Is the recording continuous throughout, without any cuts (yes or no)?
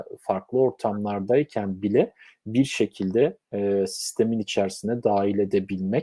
yes